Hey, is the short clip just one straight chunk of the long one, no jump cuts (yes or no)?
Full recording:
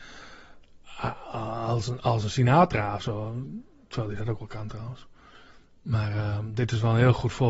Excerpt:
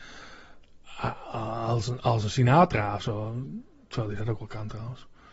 yes